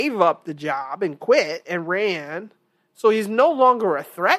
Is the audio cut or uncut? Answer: uncut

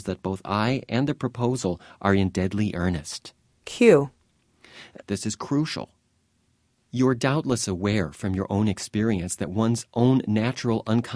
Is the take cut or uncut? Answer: cut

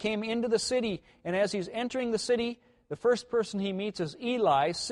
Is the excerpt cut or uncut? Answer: uncut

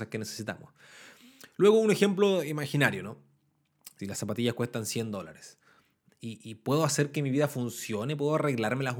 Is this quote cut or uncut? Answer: cut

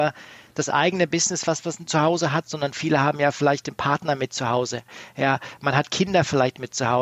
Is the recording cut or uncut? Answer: uncut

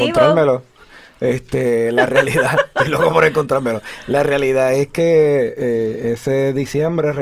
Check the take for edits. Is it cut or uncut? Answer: uncut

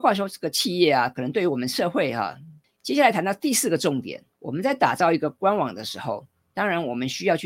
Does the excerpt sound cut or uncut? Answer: cut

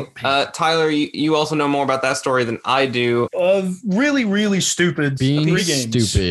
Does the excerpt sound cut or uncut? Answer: cut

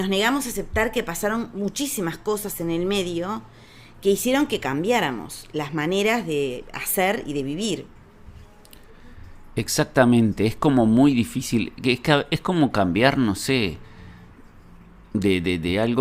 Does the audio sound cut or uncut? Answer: uncut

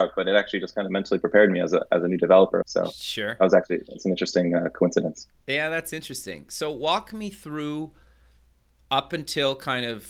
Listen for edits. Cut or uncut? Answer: cut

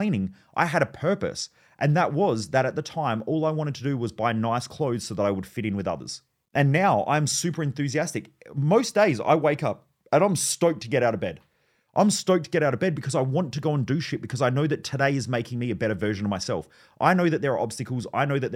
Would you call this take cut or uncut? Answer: uncut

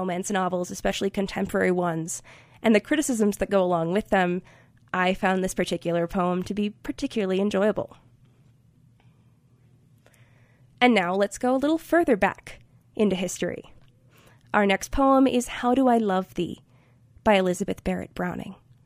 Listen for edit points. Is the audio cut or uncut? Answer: uncut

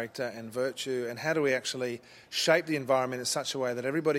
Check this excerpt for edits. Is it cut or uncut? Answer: uncut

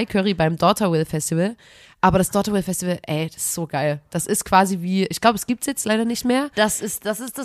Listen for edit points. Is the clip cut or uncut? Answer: uncut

